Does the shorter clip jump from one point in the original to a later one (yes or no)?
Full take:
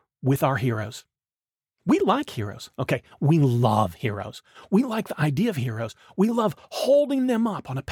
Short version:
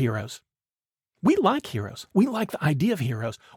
yes